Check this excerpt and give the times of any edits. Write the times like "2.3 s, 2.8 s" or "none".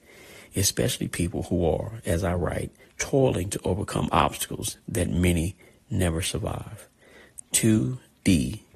2.8 s, 7.4 s